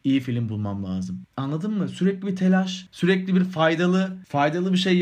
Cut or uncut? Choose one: uncut